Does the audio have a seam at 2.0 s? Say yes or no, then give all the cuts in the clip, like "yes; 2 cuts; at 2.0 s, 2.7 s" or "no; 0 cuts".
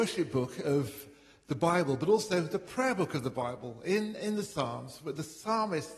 no; 0 cuts